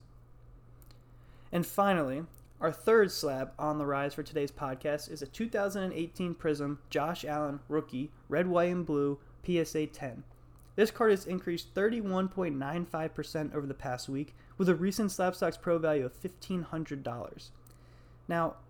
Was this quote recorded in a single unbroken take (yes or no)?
yes